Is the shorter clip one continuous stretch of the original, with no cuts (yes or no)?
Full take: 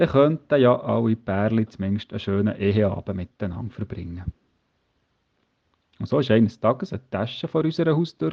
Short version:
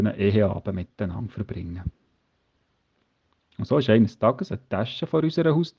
yes